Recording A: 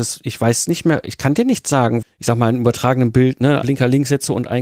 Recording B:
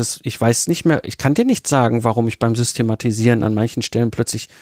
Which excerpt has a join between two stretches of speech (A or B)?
A